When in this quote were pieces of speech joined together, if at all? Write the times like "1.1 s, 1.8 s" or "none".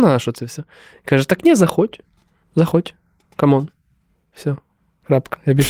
none